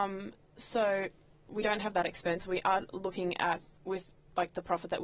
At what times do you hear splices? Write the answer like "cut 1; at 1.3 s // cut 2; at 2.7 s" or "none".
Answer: cut 1; at 1.5 s // cut 2; at 3.8 s